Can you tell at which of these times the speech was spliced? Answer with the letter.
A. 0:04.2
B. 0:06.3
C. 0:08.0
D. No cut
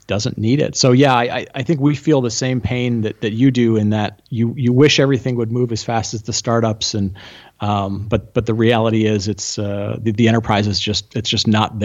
D